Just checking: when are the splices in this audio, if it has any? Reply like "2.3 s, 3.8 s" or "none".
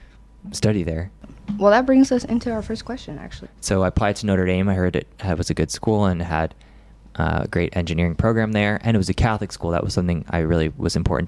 3.5 s